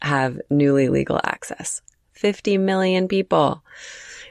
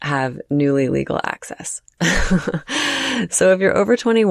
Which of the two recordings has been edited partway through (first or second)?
second